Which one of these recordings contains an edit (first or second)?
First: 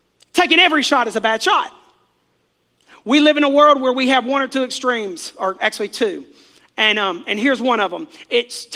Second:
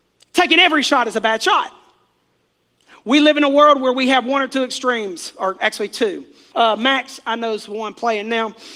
second